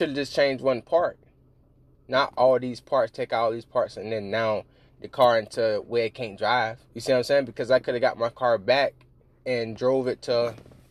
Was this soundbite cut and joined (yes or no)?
yes